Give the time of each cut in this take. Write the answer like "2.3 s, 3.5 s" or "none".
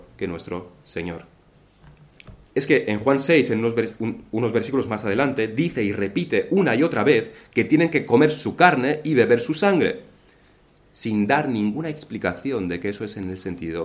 2.5 s